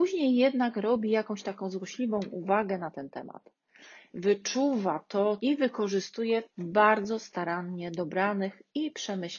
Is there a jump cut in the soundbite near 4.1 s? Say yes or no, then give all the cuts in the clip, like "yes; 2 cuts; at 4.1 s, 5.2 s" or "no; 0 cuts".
no; 2 cuts; at 5.4 s, 6.5 s